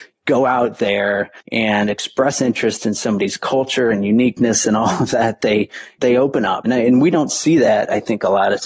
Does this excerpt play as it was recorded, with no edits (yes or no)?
no